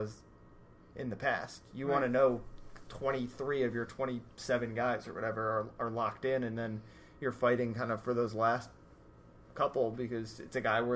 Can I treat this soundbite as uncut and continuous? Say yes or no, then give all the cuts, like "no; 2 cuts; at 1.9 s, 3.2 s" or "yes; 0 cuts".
yes; 0 cuts